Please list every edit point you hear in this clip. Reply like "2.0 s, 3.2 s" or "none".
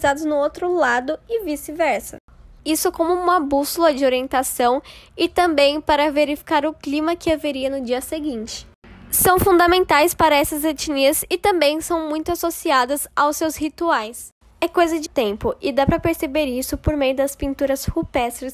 2.6 s, 15.1 s